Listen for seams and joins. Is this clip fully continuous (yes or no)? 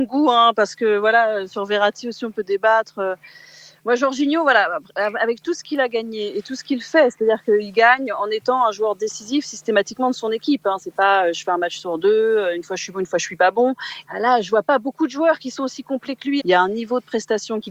no